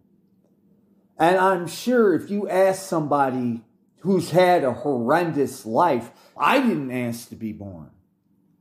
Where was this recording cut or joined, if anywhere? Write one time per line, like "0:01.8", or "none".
0:06.4